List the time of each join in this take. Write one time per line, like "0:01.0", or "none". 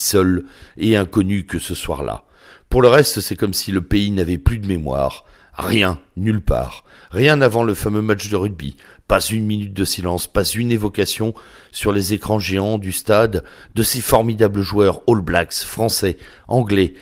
none